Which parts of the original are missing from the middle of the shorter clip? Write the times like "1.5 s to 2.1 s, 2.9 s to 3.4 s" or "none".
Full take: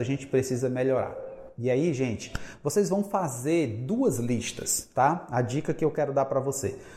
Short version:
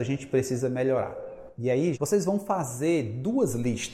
1.9 s to 2.6 s